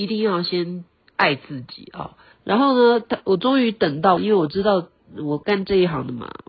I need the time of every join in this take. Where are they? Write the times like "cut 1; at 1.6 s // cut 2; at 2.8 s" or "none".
cut 1; at 2.3 s // cut 2; at 4.2 s